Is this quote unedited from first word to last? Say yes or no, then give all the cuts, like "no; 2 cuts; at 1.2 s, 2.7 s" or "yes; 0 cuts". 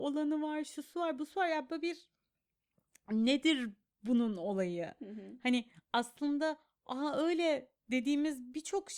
yes; 0 cuts